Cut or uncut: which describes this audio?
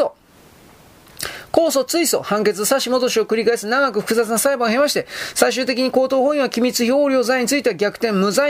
uncut